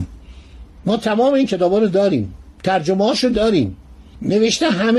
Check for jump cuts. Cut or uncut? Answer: cut